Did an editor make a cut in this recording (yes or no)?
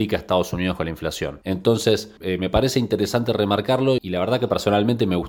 yes